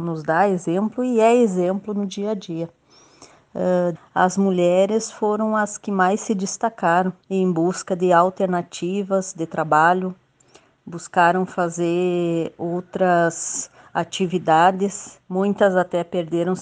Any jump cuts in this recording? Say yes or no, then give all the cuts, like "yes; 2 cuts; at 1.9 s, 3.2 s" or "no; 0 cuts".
yes; 3 cuts; at 3.9 s, 7.2 s, 15.2 s